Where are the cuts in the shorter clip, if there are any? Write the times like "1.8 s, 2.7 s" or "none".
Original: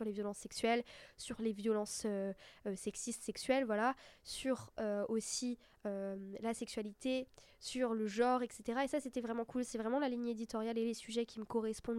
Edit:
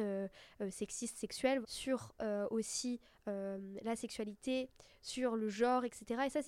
1.6 s